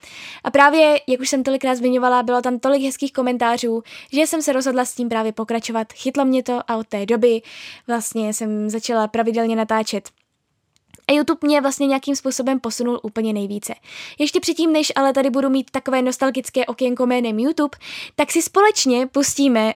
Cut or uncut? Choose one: uncut